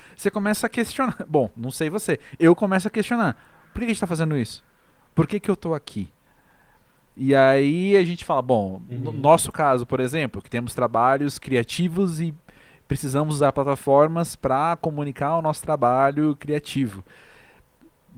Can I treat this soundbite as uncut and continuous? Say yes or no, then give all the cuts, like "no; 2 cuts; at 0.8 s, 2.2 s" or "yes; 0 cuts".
yes; 0 cuts